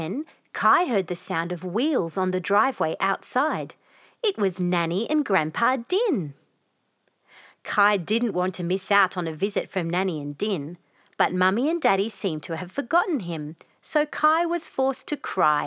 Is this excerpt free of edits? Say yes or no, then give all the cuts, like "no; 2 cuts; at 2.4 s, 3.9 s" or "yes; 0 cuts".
yes; 0 cuts